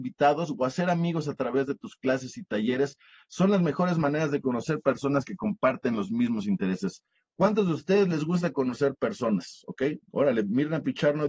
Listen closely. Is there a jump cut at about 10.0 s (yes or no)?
yes